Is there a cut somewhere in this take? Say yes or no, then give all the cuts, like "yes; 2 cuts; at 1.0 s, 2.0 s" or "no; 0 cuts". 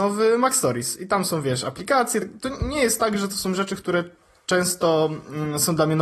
no; 0 cuts